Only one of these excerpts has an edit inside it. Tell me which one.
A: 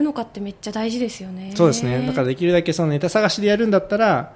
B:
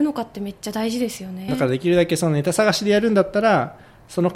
B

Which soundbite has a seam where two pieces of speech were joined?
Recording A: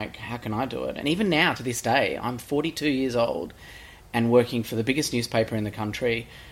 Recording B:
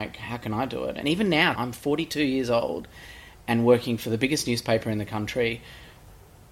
B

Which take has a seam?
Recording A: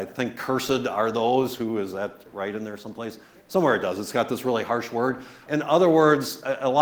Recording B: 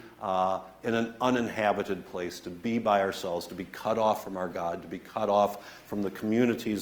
A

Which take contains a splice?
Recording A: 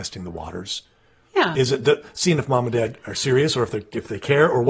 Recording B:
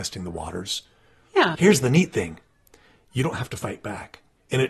B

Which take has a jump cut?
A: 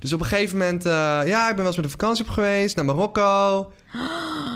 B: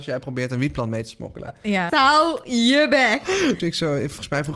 B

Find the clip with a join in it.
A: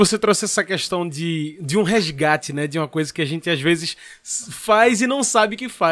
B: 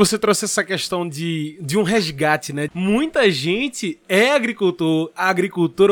B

